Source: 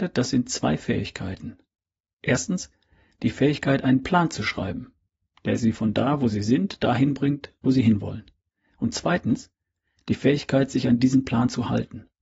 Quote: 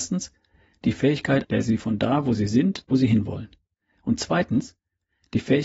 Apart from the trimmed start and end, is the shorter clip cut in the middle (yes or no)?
yes